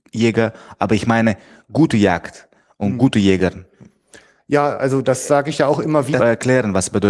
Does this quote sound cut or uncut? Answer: cut